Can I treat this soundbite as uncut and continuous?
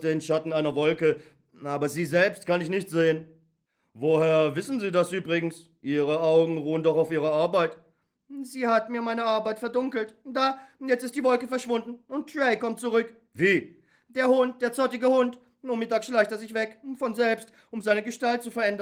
yes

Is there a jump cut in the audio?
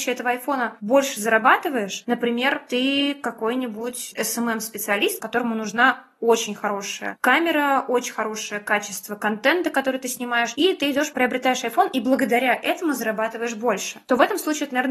no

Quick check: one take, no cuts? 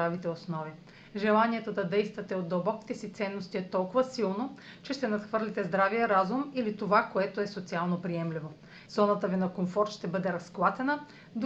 no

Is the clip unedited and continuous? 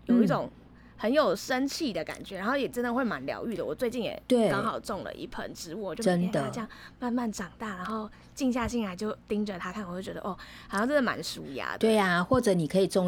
yes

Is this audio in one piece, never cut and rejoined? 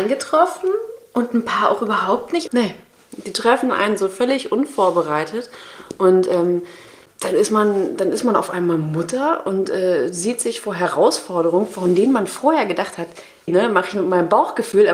no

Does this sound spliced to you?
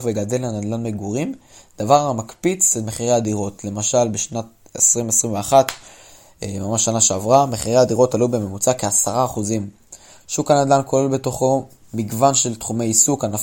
no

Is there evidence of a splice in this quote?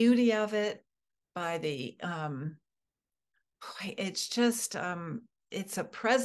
no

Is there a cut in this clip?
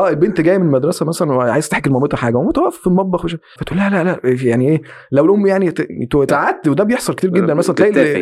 yes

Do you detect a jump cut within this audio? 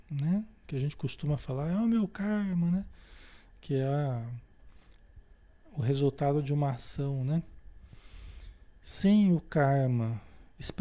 no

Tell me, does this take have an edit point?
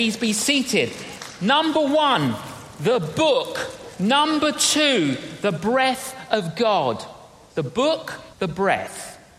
yes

